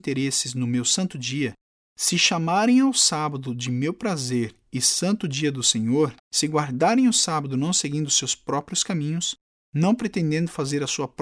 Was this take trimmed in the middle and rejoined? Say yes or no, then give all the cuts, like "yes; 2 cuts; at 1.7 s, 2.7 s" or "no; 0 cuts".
yes; 1 cut; at 6.2 s